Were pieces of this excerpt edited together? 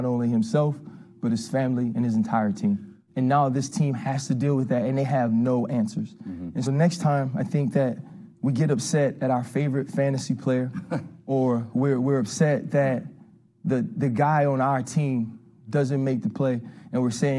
yes; 2 cuts; at 3.1 s, 6.7 s

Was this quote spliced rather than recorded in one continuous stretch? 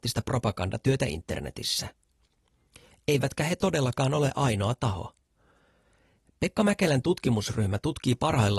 no; 0 cuts

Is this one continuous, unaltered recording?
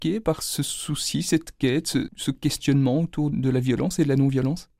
no; 2 cuts; at 2.1 s, 3.3 s

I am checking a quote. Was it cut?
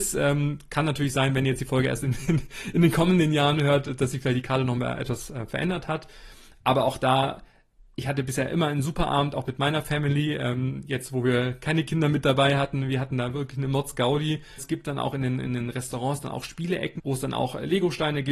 yes; 2 cuts; at 14.6 s, 17.0 s

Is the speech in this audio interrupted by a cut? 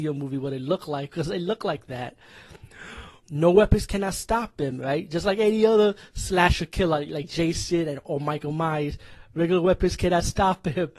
yes; 1 cut; at 3.2 s

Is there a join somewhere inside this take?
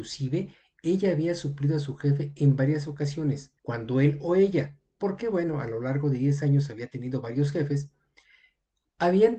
yes; 1 cut; at 3.6 s

